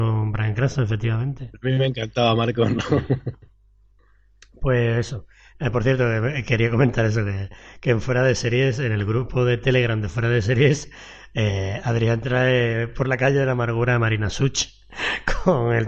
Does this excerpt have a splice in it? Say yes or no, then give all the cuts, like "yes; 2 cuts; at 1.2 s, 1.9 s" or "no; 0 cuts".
no; 0 cuts